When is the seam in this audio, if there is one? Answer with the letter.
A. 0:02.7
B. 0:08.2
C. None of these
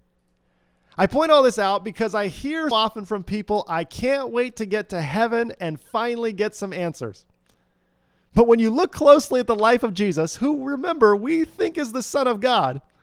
A